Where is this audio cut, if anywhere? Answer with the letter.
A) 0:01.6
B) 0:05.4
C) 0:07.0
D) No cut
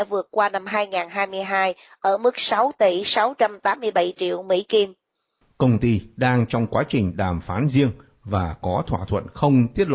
B